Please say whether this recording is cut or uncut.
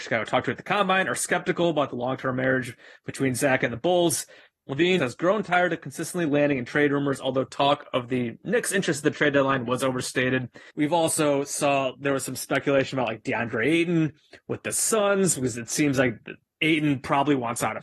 cut